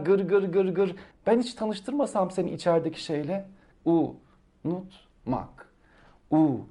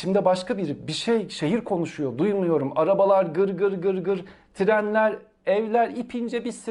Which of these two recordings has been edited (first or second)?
first